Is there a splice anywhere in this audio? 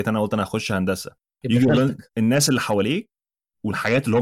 yes; 1 cut; at 2.1 s

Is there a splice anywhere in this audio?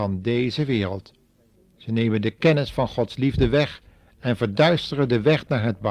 yes; 1 cut; at 1.7 s

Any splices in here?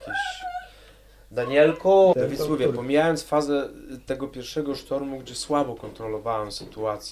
yes; 1 cut; at 2.1 s

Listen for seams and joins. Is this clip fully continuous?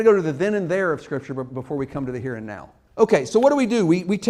no; 1 cut; at 2.9 s

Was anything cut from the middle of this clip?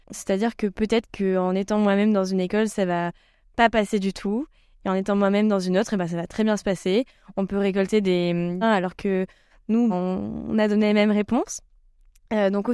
yes; 2 cuts; at 8.6 s, 9.9 s

